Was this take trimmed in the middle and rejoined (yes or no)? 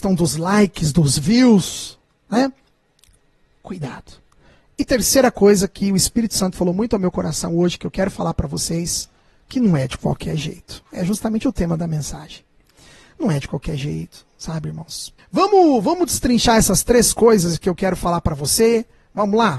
yes